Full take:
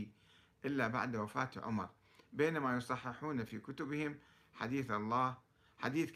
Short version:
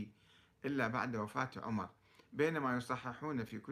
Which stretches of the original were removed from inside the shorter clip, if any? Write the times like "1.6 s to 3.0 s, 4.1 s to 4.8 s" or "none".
none